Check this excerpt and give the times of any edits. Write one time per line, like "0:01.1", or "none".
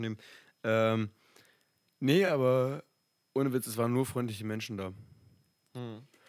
none